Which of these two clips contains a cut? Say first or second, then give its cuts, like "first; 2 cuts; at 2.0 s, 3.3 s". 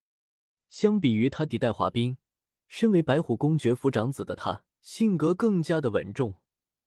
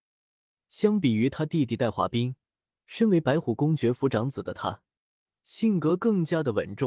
first; 2 cuts; at 1.5 s, 4.7 s